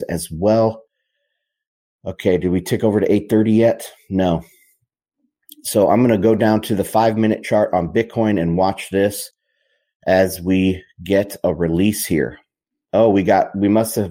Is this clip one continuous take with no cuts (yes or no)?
yes